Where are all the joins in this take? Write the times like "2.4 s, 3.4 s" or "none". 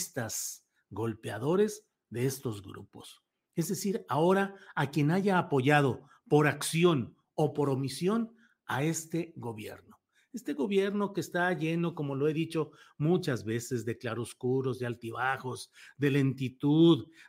none